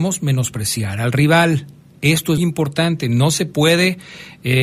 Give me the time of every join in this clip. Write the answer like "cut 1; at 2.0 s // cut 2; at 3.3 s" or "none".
cut 1; at 2.4 s

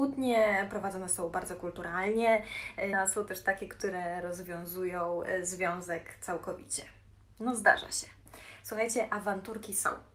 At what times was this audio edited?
cut 1; at 2.9 s

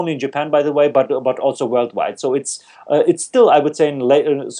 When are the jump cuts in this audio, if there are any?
none

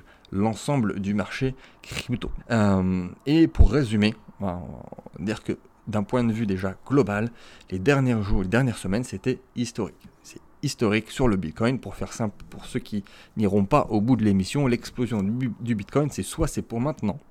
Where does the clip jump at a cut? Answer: cut 1; at 2.4 s

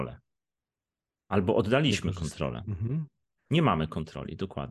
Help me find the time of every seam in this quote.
cut 1; at 3.4 s

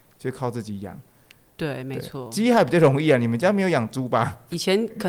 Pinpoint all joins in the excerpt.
none

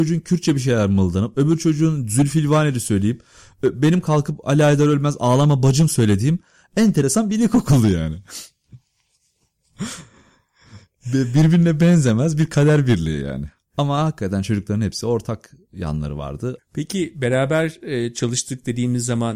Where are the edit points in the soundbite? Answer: cut 1; at 16.6 s

